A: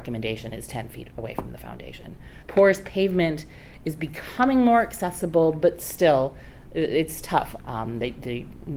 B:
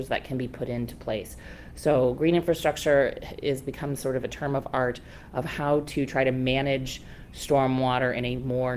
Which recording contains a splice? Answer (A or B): A